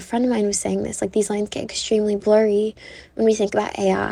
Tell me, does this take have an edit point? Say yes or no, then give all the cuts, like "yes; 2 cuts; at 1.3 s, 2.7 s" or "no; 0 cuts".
no; 0 cuts